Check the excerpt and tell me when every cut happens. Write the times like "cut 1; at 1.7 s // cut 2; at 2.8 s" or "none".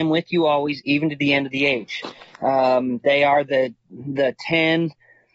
none